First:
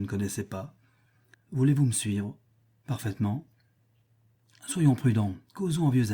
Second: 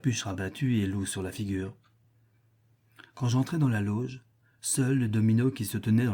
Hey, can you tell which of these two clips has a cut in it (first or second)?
first